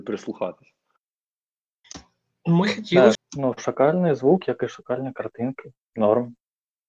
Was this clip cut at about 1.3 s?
no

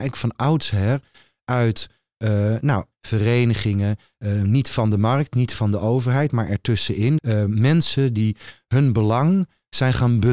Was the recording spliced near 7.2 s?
yes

